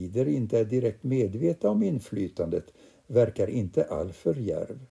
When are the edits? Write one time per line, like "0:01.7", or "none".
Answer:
none